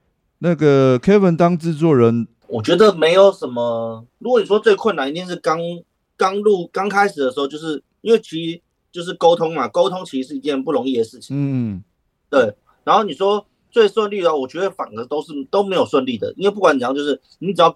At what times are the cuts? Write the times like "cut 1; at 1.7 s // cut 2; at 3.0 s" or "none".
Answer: cut 1; at 2.4 s // cut 2; at 4.1 s